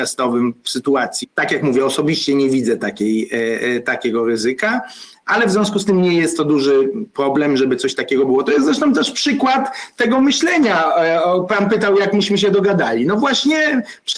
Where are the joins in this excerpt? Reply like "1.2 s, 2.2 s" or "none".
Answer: 1.2 s